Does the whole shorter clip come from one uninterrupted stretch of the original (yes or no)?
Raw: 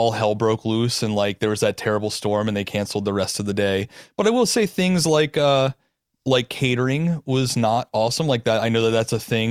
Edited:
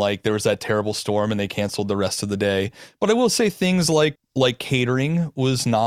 no